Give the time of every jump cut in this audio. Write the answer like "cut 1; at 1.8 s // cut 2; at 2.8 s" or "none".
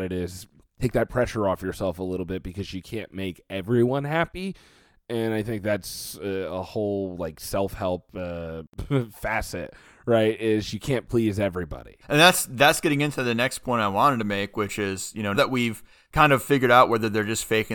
cut 1; at 12.0 s // cut 2; at 15.3 s